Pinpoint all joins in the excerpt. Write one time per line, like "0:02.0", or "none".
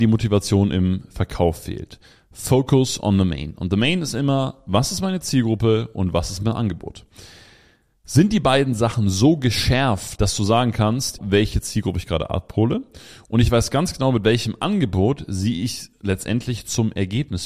0:10.2
0:11.2